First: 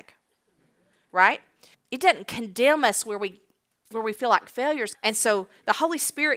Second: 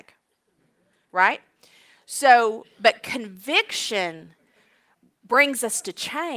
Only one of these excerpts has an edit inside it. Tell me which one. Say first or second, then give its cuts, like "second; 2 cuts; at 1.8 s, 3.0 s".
first; 2 cuts; at 1.7 s, 4.9 s